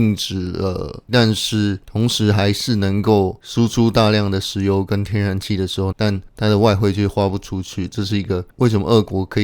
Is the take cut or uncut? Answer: cut